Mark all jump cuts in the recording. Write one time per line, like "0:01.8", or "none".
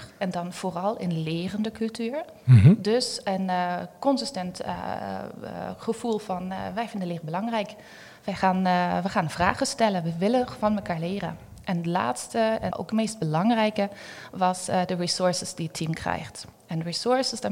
0:08.2
0:12.7